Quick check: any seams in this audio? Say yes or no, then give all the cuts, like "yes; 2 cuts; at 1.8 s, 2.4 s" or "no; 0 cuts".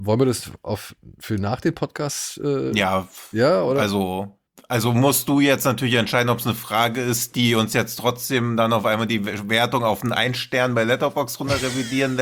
no; 0 cuts